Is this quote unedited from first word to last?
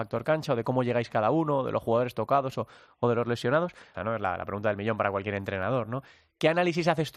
no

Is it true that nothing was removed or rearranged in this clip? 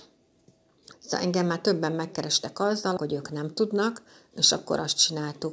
no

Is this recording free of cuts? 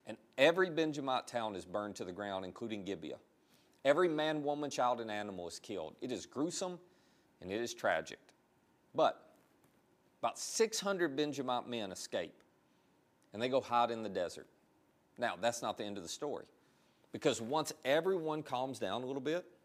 yes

